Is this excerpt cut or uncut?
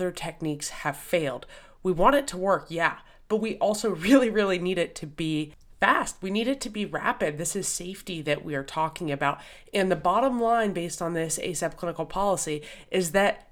uncut